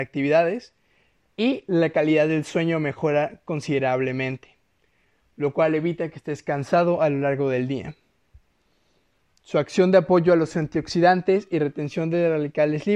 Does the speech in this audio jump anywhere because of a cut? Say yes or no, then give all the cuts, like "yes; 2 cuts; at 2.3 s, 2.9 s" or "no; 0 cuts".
no; 0 cuts